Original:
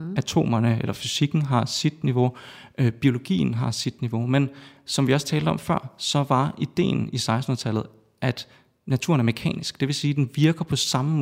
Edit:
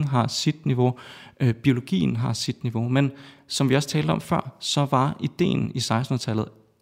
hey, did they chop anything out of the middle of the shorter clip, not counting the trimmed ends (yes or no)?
no